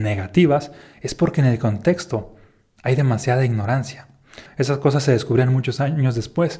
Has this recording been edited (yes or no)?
yes